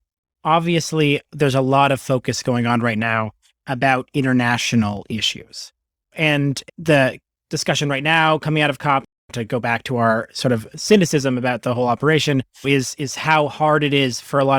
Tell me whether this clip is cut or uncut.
uncut